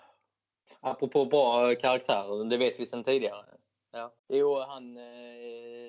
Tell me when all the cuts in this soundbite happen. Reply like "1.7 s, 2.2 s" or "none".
4.2 s